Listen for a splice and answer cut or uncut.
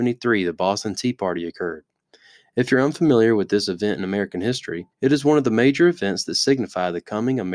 cut